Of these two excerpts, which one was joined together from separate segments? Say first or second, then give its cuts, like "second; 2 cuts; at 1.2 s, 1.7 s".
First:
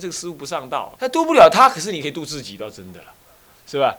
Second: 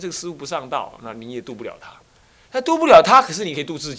first; 1 cut; at 0.9 s